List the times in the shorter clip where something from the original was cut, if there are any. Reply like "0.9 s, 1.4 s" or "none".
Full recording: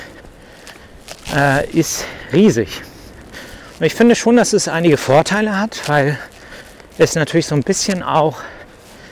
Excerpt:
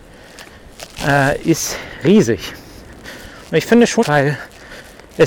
4.0 s